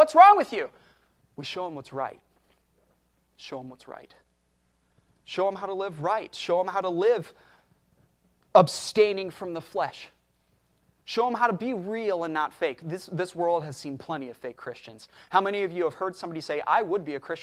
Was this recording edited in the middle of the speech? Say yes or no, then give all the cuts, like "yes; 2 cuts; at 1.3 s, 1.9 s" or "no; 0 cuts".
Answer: no; 0 cuts